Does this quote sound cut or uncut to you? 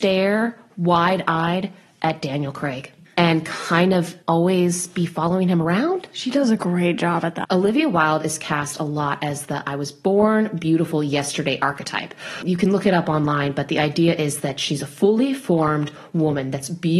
cut